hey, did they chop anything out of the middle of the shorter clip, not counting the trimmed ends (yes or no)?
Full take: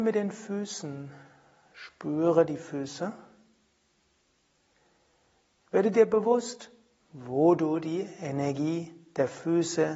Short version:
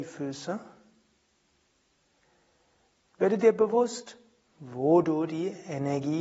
no